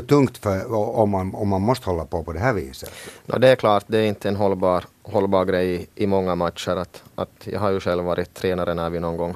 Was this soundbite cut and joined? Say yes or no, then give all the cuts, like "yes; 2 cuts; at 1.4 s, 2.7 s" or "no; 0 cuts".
no; 0 cuts